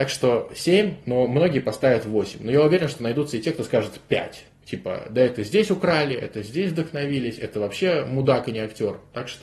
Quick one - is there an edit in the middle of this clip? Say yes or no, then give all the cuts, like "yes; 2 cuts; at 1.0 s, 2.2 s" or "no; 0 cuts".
no; 0 cuts